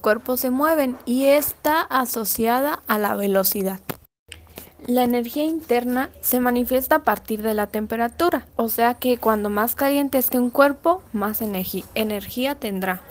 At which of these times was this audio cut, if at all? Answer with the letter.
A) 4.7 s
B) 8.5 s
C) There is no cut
B